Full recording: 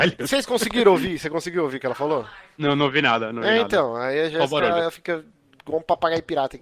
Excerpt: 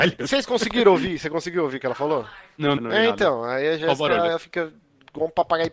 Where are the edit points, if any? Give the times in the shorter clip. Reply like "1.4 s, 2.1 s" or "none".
2.8 s